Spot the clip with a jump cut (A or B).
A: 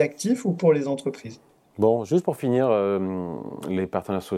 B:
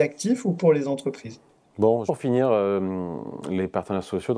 B